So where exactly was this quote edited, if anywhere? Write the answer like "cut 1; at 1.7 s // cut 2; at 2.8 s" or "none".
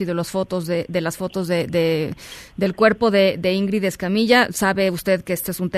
none